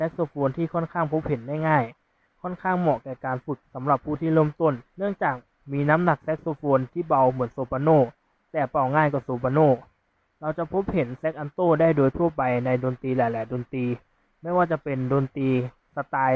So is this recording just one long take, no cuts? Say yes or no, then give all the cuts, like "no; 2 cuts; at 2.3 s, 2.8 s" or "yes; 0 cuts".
no; 1 cut; at 4.9 s